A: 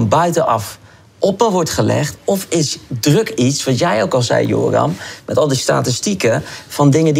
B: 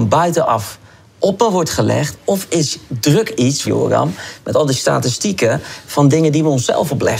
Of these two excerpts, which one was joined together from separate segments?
B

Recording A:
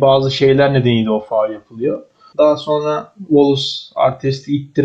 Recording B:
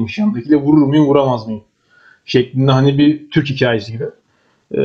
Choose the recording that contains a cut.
A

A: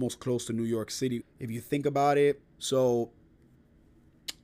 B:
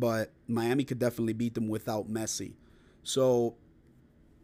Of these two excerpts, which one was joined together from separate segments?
A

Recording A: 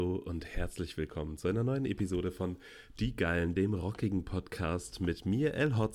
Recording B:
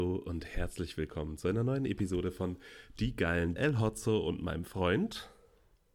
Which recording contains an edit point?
B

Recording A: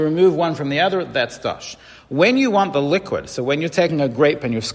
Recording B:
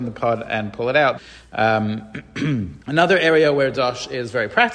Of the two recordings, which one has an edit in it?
B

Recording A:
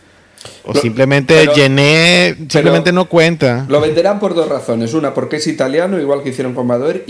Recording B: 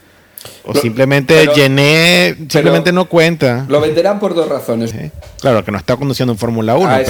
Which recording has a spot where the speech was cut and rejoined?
B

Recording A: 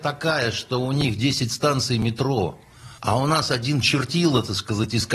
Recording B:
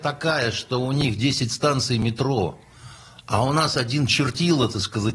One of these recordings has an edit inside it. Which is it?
A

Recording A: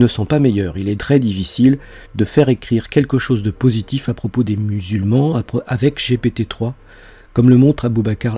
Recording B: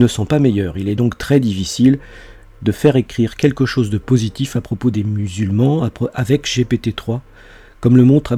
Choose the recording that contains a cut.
A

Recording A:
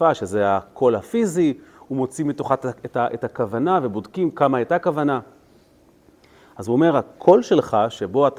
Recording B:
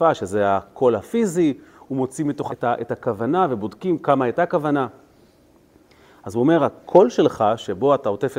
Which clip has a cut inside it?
B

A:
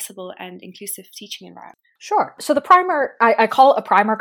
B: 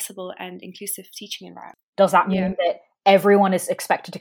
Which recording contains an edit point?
B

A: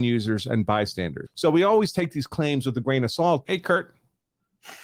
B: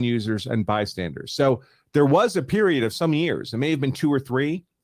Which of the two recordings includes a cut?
A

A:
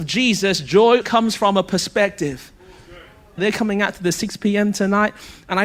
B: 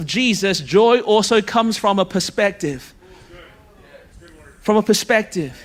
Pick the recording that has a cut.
A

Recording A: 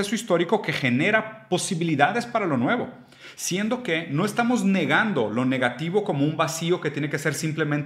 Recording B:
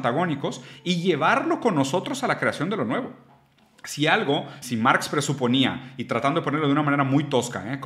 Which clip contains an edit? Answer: B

